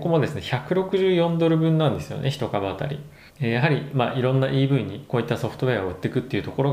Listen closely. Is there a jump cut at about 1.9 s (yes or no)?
no